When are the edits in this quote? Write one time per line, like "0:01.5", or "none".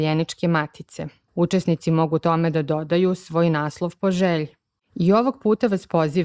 0:01.3
0:04.8